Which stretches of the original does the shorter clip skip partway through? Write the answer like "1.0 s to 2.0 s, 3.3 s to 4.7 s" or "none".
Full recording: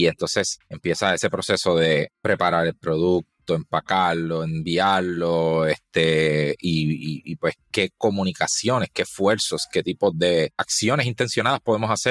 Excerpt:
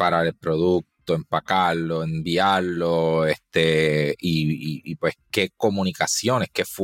none